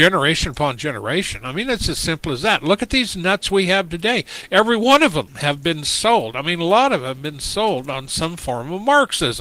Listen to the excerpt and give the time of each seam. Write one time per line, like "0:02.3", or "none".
none

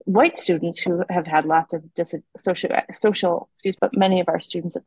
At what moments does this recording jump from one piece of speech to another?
0:03.8

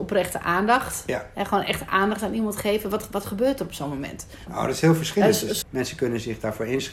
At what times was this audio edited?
0:04.5
0:05.6

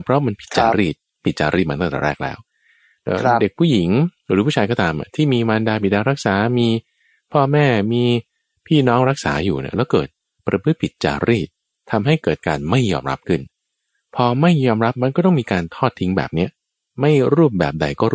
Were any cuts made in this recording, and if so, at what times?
0:10.4

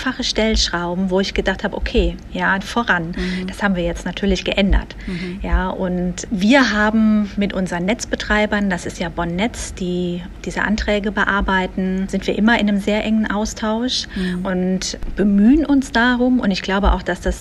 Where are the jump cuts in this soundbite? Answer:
0:02.6

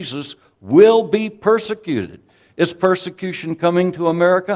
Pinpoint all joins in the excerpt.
none

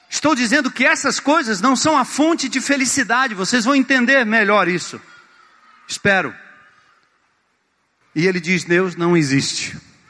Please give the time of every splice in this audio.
0:08.0

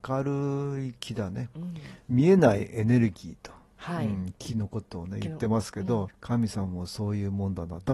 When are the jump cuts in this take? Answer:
0:06.1

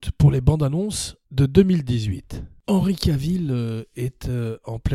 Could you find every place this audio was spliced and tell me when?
none

